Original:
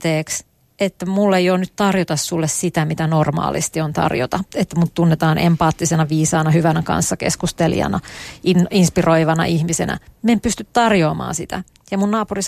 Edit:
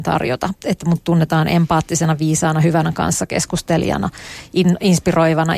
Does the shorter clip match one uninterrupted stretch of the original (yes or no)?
yes